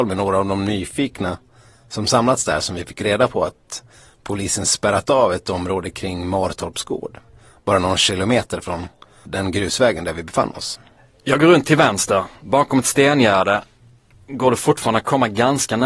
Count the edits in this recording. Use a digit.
0